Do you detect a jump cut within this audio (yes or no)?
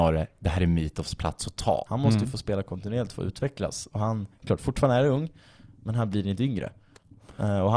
yes